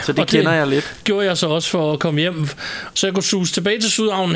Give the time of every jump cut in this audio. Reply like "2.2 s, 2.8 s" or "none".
2.9 s